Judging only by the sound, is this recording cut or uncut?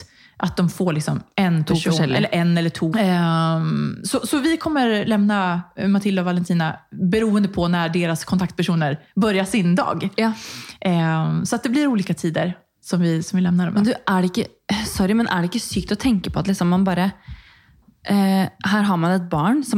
cut